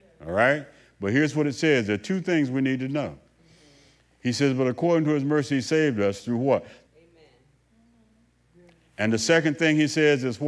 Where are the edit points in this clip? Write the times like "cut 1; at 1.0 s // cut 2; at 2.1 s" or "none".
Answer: cut 1; at 6.9 s

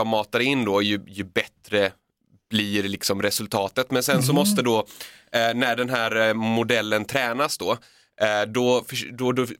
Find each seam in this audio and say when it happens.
none

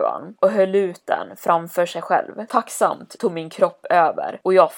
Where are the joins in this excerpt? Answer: cut 1; at 2.5 s

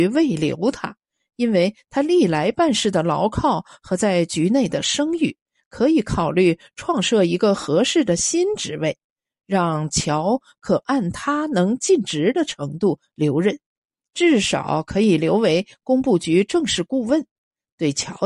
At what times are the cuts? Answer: none

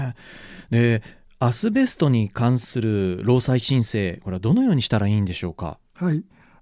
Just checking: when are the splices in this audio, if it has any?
none

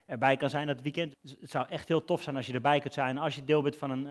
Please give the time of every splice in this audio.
cut 1; at 1.1 s

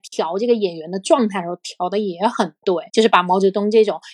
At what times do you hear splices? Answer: cut 1; at 2.9 s

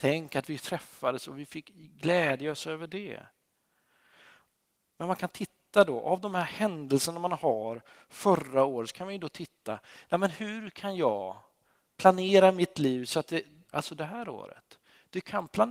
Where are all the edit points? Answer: cut 1; at 13.7 s

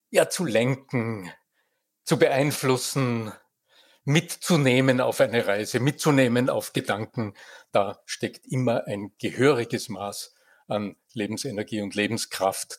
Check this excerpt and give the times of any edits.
none

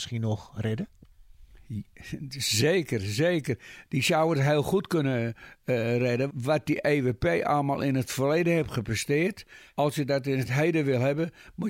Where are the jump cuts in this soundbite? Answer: cut 1; at 6.3 s // cut 2; at 9.7 s

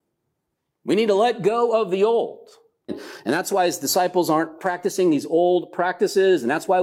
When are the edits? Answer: cut 1; at 2.9 s // cut 2; at 4.6 s

